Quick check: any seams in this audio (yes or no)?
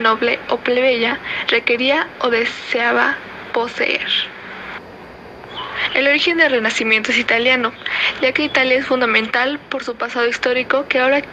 no